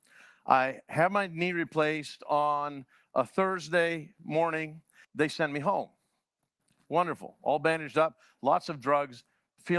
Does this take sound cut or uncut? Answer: cut